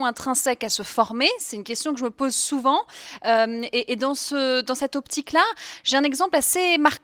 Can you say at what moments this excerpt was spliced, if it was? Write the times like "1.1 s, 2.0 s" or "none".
none